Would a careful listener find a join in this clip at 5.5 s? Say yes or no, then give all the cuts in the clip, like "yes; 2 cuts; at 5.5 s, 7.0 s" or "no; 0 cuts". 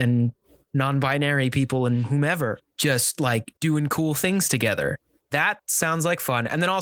no; 1 cut; at 3.6 s